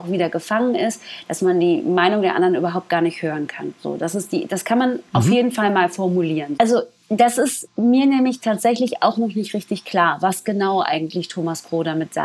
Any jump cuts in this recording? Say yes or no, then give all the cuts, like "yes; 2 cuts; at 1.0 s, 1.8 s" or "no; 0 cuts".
yes; 1 cut; at 6.6 s